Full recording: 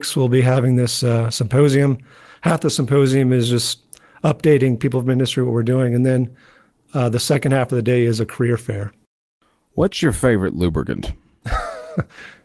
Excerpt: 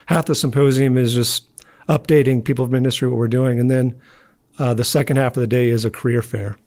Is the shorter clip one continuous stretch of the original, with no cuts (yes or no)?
yes